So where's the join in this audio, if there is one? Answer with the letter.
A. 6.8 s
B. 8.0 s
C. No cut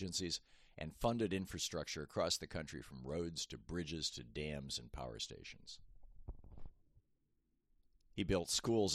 C